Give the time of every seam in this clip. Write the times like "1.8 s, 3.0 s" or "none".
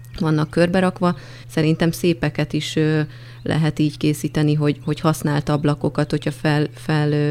1.4 s